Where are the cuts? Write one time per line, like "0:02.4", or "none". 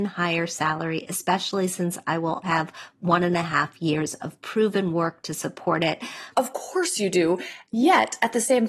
0:02.4
0:06.3